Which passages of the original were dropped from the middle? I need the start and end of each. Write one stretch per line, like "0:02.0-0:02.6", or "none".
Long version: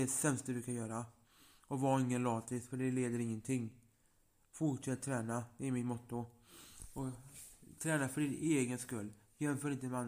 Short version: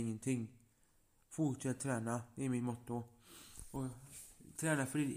none